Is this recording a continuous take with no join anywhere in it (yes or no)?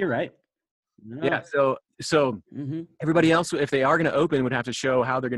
yes